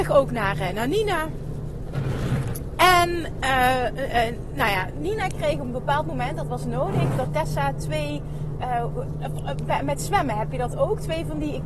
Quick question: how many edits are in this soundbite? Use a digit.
0